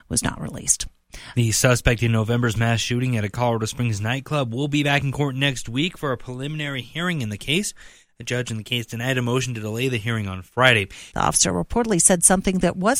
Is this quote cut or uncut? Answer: cut